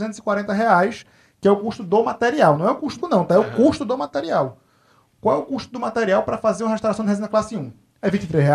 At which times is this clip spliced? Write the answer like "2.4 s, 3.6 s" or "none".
3.0 s